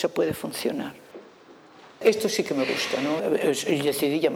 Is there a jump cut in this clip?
yes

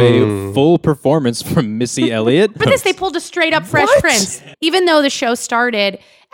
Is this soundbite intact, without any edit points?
no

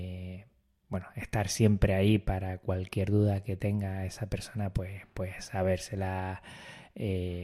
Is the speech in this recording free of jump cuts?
yes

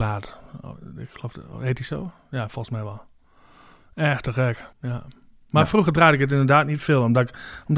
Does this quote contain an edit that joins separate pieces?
yes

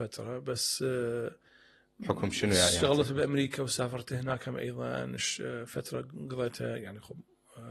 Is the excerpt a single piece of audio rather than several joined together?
yes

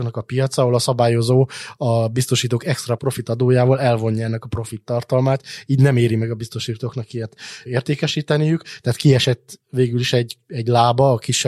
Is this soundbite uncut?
yes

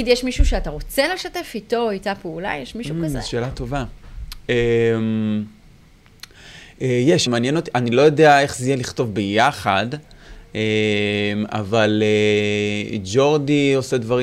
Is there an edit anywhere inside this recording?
yes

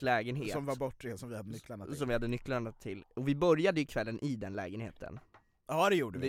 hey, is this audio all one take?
yes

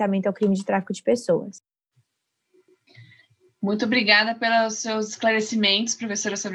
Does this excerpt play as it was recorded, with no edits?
yes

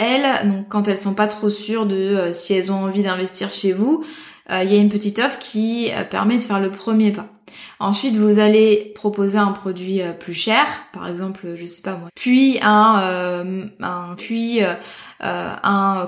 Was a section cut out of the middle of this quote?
yes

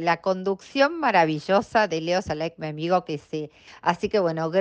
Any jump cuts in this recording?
yes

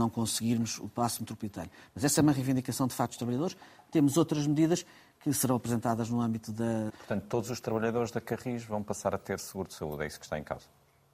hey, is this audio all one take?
no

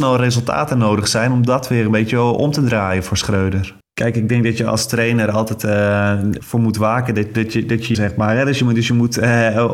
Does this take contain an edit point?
yes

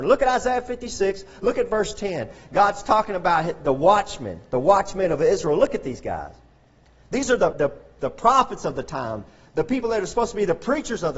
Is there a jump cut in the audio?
yes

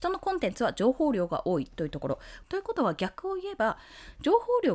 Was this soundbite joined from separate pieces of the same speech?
yes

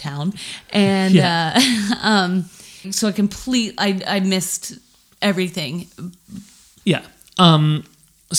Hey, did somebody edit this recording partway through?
yes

